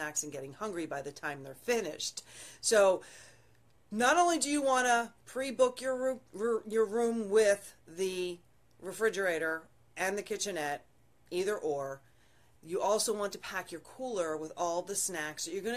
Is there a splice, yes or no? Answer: no